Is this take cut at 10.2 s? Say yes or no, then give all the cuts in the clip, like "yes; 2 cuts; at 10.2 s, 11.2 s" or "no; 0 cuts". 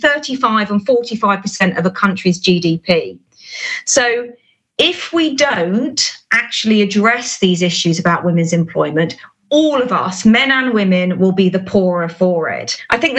no; 0 cuts